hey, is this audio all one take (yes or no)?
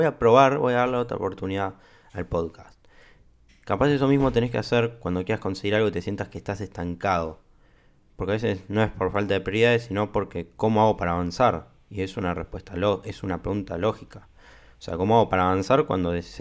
yes